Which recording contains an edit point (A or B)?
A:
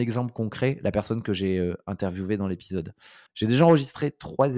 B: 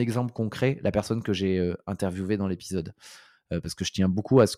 A